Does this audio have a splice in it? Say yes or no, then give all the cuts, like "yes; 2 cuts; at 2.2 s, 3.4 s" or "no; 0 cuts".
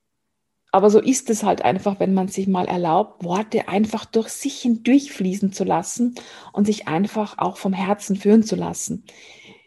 no; 0 cuts